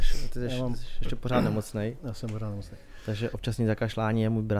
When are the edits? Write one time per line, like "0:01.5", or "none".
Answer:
0:03.3